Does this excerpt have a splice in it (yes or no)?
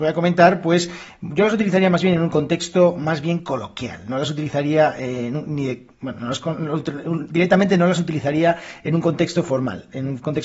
no